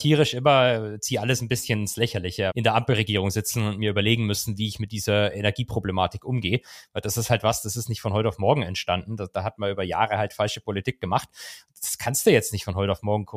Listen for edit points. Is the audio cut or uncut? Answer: cut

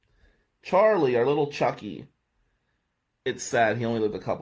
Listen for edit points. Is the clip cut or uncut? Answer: uncut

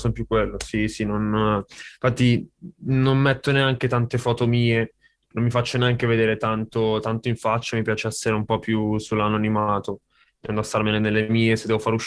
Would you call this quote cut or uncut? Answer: uncut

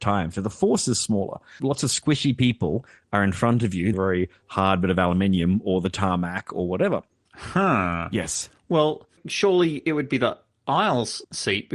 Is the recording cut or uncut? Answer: cut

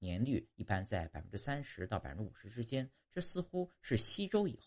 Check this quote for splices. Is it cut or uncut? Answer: uncut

